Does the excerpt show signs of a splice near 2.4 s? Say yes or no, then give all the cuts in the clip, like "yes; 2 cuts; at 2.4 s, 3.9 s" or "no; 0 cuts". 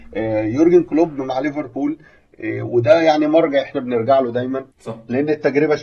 no; 1 cut; at 4.7 s